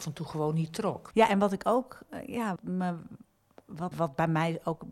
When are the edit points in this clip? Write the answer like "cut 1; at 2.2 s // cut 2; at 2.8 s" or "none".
cut 1; at 1.1 s // cut 2; at 2.6 s // cut 3; at 3.9 s